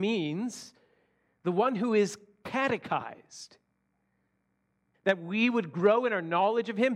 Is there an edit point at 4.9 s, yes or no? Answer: yes